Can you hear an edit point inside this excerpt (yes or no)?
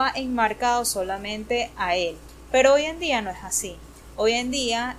no